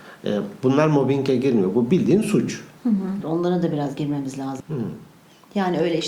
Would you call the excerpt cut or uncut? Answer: cut